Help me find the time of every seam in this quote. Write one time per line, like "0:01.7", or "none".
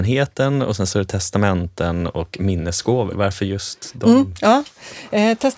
0:03.1